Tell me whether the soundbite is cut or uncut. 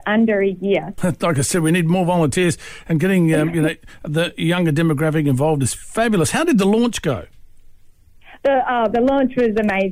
cut